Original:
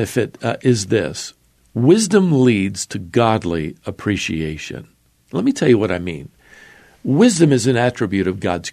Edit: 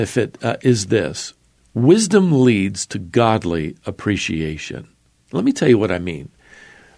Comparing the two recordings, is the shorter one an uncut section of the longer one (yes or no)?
yes